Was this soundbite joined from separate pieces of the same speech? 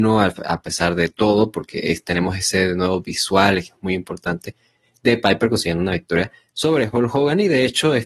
no; 0 cuts

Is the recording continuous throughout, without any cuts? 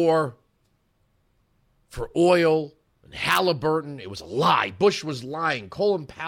yes; 0 cuts

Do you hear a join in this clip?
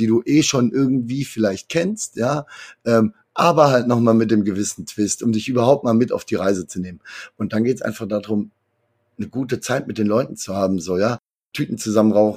no; 0 cuts

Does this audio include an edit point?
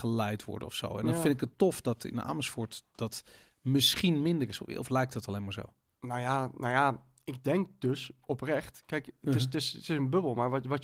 no; 0 cuts

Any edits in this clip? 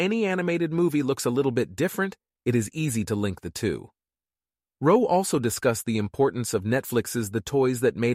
no; 0 cuts

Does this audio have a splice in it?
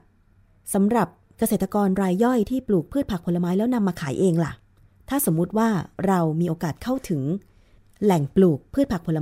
no; 0 cuts

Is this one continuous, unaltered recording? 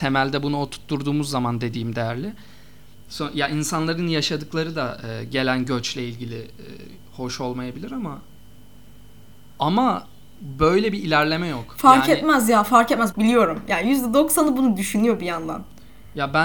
no; 2 cuts; at 3.1 s, 13.1 s

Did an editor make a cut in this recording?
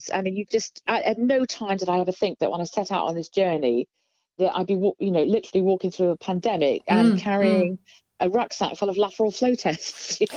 no; 0 cuts

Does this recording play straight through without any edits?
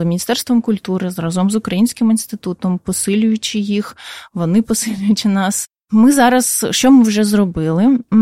yes; 0 cuts

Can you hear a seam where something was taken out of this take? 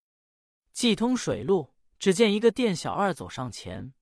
yes; 1 cut; at 1.9 s

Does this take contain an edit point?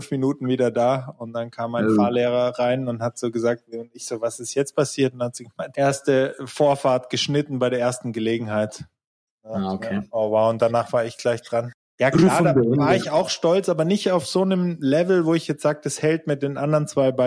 no; 0 cuts

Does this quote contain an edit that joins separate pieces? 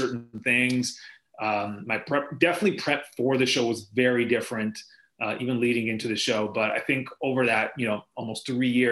no; 0 cuts

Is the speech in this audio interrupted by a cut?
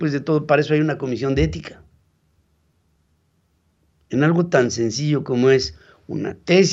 no; 0 cuts

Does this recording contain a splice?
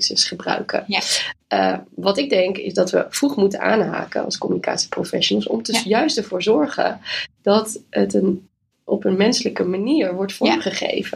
no; 0 cuts

